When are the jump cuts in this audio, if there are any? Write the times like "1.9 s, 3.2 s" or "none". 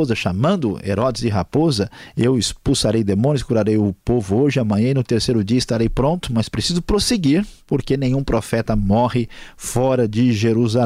none